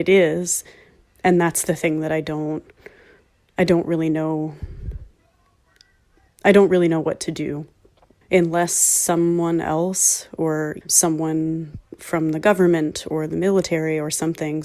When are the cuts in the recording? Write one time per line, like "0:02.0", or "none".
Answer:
0:08.2
0:10.8